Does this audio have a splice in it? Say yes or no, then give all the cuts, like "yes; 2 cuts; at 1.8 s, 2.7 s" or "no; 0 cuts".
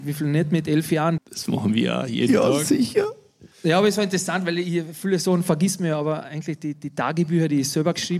yes; 2 cuts; at 1.2 s, 3.5 s